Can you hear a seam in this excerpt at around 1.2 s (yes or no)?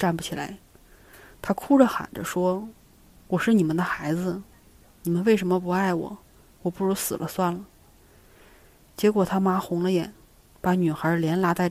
no